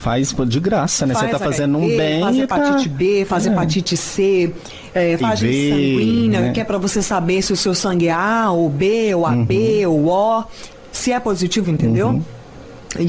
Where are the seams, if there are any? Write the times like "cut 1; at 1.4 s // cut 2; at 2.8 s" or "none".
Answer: cut 1; at 5.2 s // cut 2; at 11.6 s